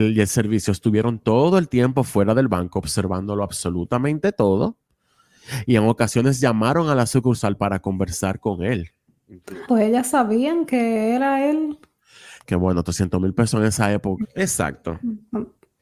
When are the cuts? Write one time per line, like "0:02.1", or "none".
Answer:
0:09.7
0:12.4
0:14.2

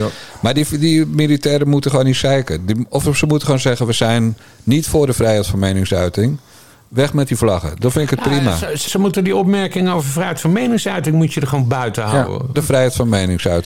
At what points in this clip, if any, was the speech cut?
0:08.9
0:12.5

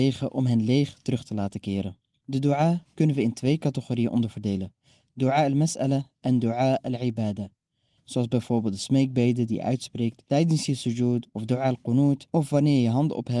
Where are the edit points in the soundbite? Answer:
0:08.0

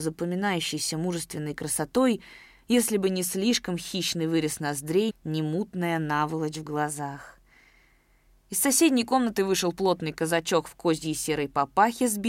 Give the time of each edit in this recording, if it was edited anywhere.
0:05.1

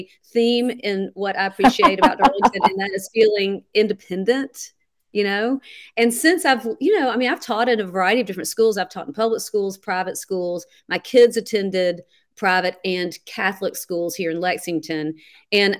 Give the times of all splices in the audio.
none

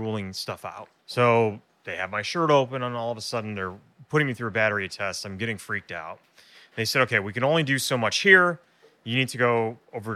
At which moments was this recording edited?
0:01.0

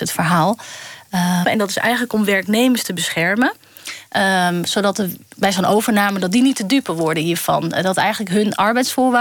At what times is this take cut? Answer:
0:01.4

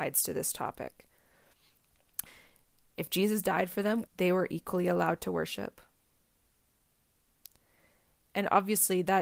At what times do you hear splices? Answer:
0:02.3
0:04.1

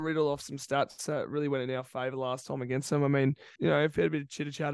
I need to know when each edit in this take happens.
0:03.6

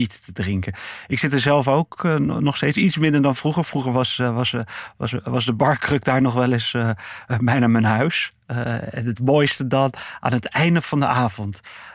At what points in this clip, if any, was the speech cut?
none

